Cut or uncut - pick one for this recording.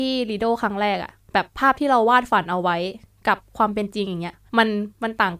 cut